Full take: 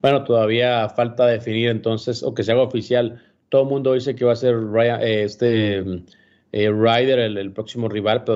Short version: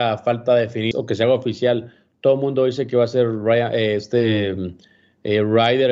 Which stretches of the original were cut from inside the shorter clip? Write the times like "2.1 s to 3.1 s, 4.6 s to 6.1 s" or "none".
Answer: 1.6 s to 2.2 s